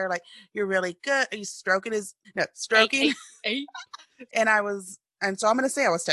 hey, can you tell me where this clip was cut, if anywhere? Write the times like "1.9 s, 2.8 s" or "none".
2.2 s, 4.3 s